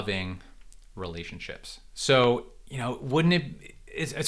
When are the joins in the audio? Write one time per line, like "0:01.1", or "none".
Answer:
none